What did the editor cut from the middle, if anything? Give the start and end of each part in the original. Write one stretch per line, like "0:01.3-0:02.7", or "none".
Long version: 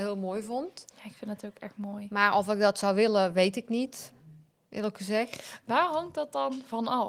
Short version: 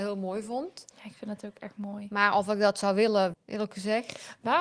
0:03.3-0:04.6